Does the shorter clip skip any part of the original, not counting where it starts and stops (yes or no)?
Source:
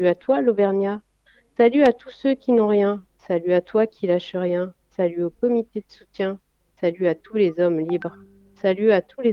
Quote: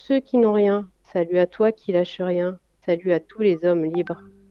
yes